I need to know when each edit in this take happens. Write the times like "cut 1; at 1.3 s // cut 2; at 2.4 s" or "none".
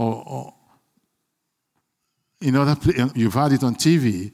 cut 1; at 3.1 s